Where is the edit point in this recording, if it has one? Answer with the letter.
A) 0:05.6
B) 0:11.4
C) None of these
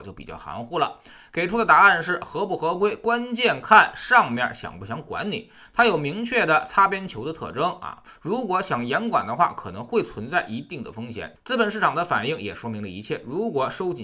B